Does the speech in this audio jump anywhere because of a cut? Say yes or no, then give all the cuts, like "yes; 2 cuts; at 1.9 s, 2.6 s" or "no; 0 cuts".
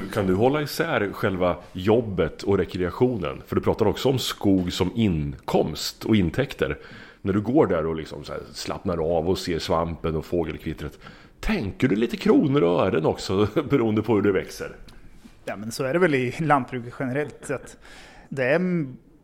yes; 1 cut; at 18.2 s